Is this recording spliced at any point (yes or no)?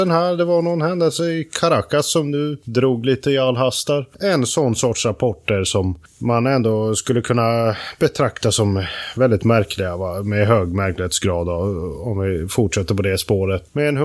no